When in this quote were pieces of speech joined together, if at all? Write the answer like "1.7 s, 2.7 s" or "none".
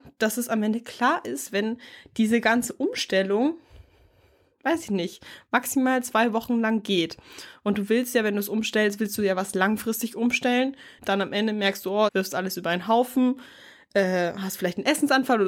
11.0 s, 12.1 s